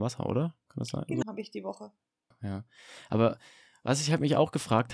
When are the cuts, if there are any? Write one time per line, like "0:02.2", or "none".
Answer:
0:01.2